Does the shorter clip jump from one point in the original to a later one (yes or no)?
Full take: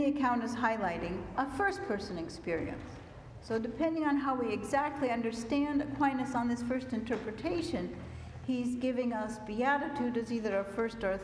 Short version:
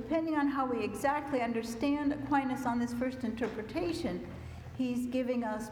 no